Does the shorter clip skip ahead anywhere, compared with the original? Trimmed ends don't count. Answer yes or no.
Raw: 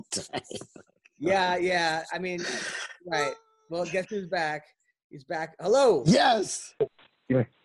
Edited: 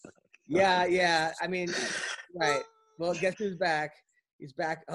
no